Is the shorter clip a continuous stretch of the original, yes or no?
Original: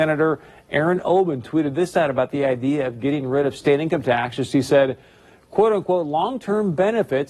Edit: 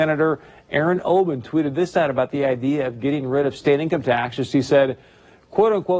yes